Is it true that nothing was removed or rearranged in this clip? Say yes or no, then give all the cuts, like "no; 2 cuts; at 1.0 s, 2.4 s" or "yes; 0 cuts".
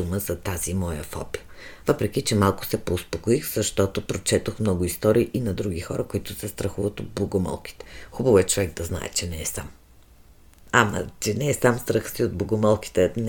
yes; 0 cuts